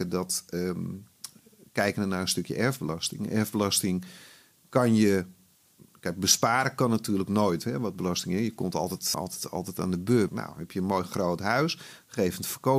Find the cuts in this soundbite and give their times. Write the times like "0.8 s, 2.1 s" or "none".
9.1 s, 10.3 s

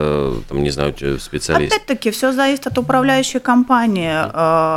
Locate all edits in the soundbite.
none

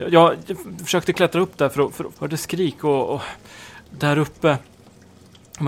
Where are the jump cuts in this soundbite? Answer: 2.1 s

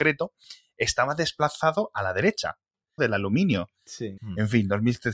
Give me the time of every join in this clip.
3.0 s, 4.2 s

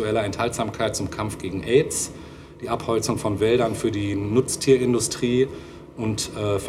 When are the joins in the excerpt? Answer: none

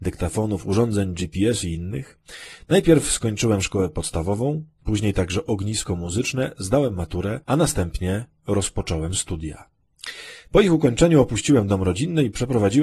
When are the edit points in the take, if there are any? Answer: 7.4 s

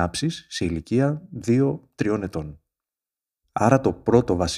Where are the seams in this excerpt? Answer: none

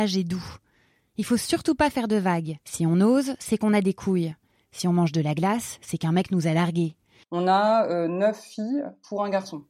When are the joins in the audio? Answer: 2.6 s, 7.2 s

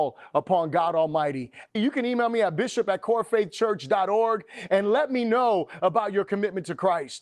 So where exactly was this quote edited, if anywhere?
1.8 s

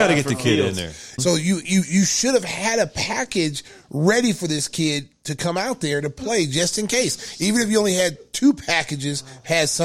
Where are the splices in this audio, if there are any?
1.2 s

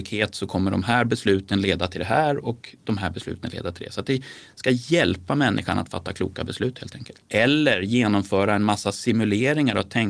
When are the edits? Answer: 7.2 s

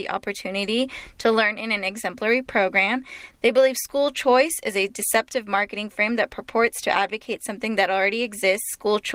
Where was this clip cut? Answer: 3.3 s

